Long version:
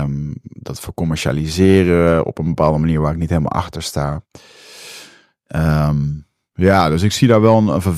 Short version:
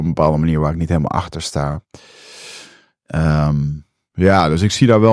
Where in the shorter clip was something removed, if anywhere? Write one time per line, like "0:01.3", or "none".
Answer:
none